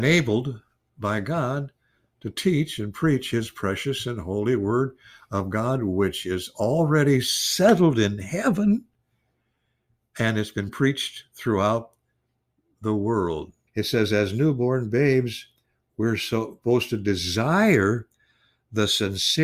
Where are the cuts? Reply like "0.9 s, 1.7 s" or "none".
13.7 s